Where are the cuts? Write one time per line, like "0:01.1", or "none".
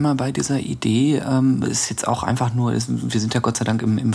none